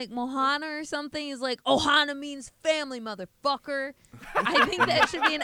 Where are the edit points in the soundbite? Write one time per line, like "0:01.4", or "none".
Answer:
none